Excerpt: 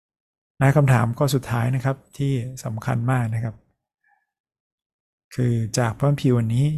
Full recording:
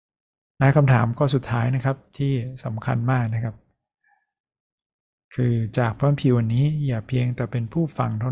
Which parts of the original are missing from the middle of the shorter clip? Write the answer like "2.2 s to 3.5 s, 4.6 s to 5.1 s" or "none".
none